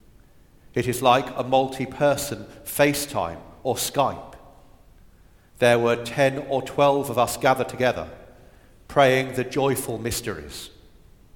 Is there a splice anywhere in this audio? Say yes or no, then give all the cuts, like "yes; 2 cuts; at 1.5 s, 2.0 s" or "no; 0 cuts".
no; 0 cuts